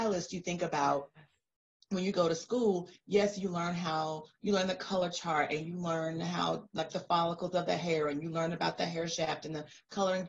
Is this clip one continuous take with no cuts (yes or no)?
yes